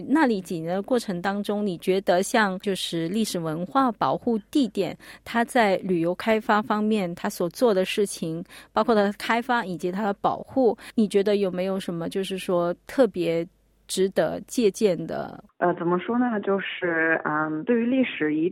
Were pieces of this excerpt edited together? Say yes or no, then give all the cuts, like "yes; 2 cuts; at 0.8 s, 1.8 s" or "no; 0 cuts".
no; 0 cuts